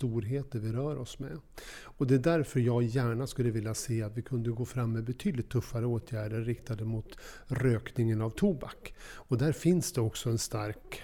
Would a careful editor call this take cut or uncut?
uncut